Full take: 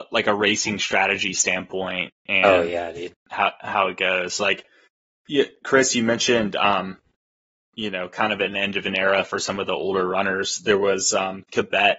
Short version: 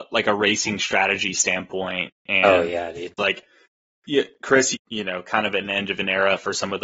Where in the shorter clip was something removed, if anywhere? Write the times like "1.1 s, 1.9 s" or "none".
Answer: 3.2 s, 4.7 s